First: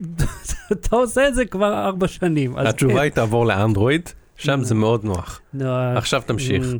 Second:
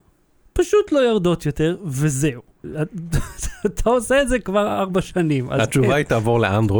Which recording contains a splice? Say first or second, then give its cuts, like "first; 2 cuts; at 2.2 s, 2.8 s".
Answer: second; 1 cut; at 2.6 s